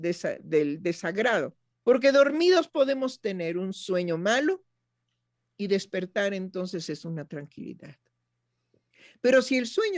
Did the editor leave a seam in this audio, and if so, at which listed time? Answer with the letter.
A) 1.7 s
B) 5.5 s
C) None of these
A